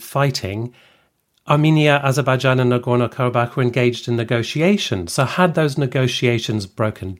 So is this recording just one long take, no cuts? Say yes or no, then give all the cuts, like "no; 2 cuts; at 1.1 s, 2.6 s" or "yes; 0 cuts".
yes; 0 cuts